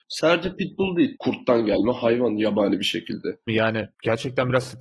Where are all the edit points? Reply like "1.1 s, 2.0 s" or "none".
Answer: 1.1 s, 3.5 s

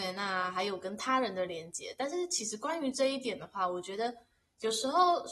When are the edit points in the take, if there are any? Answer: none

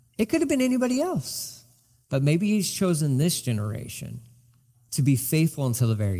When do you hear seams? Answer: none

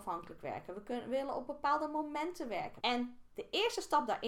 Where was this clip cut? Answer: 2.8 s

